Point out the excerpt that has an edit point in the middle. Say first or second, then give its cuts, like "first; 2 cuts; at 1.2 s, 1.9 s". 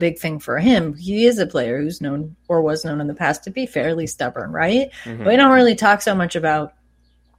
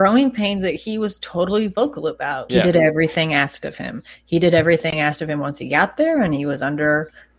second; 1 cut; at 2.5 s